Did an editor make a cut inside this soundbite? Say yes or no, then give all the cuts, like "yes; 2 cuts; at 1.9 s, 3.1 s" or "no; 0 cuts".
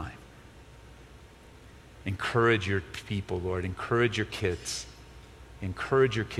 no; 0 cuts